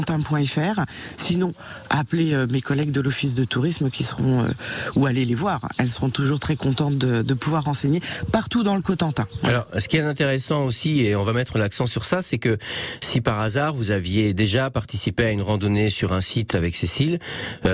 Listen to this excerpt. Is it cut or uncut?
uncut